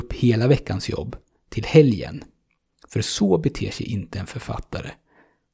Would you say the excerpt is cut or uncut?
uncut